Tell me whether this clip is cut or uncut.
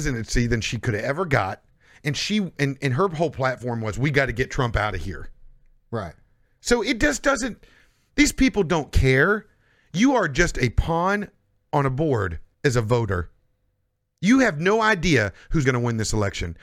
cut